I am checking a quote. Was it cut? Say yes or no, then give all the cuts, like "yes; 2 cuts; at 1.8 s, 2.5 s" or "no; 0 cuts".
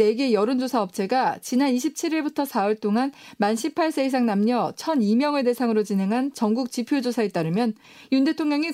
no; 0 cuts